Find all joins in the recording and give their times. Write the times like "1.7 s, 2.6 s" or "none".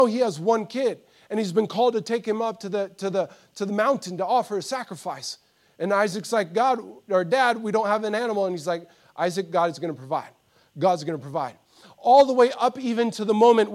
none